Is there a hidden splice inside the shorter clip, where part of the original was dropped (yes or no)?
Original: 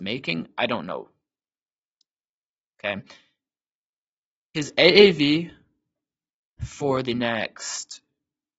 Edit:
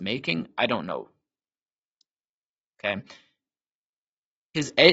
no